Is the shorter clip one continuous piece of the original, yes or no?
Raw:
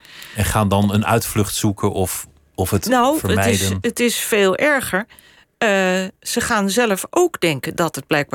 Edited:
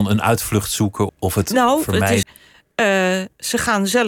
no